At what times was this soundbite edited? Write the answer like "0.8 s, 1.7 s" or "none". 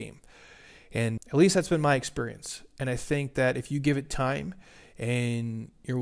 1.2 s